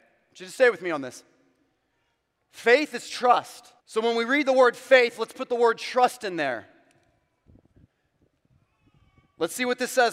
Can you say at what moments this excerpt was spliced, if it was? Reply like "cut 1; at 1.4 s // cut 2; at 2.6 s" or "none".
cut 1; at 3.8 s